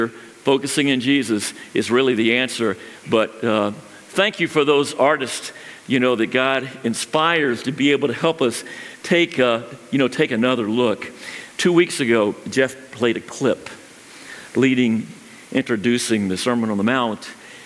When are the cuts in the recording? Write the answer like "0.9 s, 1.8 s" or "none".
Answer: none